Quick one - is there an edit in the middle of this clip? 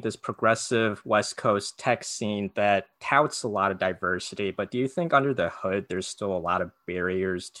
no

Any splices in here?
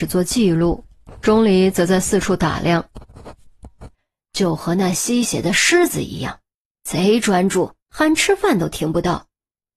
yes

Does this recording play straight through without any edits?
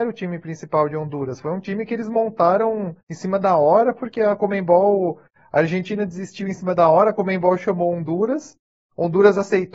no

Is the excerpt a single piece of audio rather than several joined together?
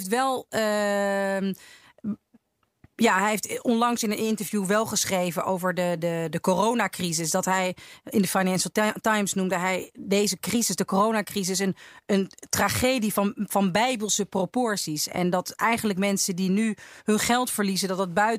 yes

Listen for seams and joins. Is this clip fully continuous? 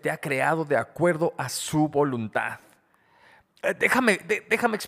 yes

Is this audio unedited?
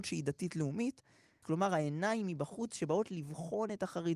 no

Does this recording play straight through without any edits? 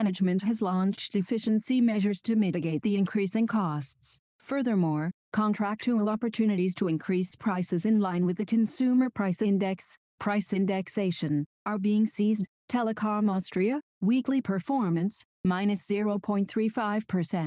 yes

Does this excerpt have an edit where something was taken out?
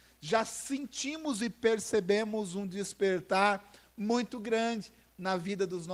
no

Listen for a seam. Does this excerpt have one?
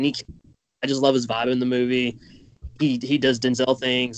no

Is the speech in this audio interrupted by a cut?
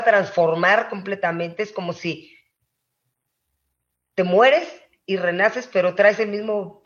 no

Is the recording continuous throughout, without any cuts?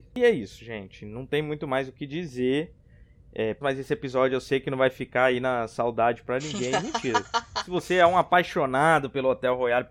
no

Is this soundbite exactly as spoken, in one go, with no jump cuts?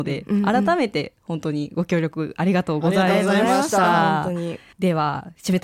no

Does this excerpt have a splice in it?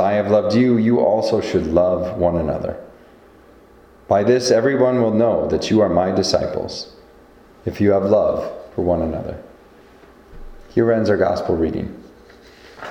no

